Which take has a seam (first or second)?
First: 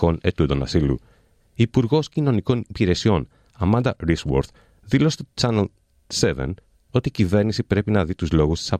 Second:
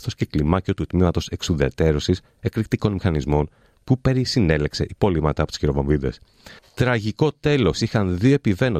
second